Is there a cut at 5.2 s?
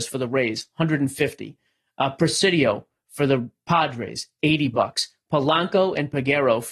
no; 0 cuts

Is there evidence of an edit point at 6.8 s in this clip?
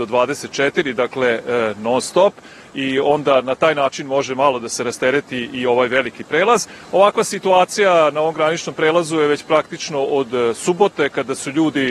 yes; 1 cut; at 6.8 s

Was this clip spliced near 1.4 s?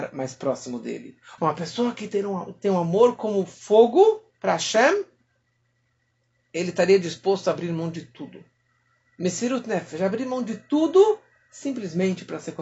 yes; 1 cut; at 1.4 s

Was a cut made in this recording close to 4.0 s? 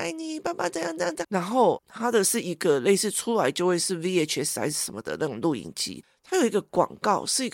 no; 1 cut; at 1.2 s

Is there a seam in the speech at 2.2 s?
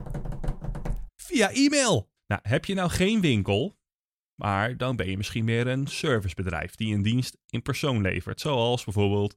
yes; 2 cuts; at 1.1 s, 2.2 s

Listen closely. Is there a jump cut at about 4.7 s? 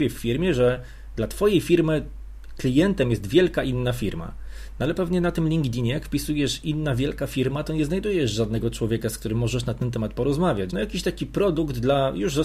no; 1 cut; at 10.7 s

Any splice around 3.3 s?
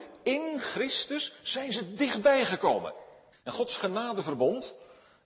yes; 1 cut; at 3.3 s

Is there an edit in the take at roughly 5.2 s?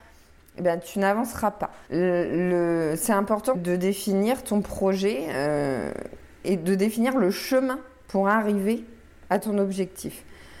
no; 2 cuts; at 1.9 s, 3.5 s

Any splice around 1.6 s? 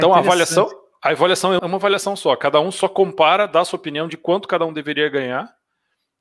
yes; 1 cut; at 1.6 s

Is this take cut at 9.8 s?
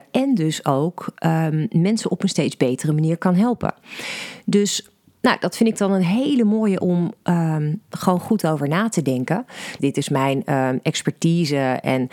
yes; 1 cut; at 9.8 s

